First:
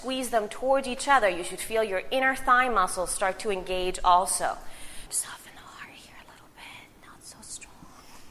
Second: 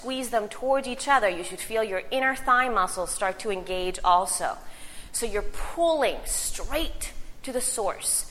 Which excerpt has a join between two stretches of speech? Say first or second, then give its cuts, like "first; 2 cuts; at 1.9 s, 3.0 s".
first; 1 cut; at 5.1 s